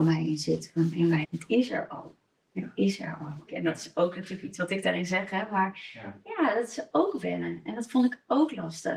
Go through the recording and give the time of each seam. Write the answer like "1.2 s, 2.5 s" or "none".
1.2 s, 3.5 s